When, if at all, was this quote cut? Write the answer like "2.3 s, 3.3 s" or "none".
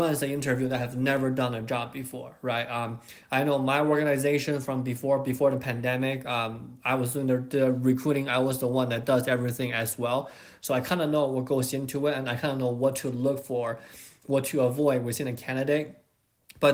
none